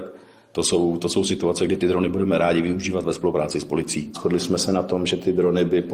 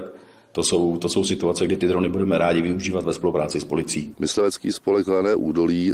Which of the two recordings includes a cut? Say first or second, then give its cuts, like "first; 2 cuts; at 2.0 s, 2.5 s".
second; 1 cut; at 4.1 s